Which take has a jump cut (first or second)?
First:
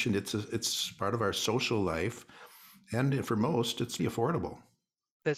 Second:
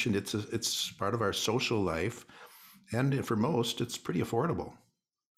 first